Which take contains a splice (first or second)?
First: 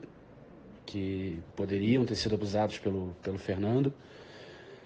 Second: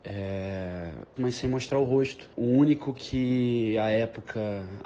second